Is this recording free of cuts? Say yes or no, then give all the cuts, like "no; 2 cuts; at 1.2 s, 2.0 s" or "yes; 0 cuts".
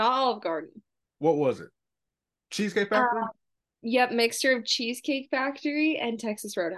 yes; 0 cuts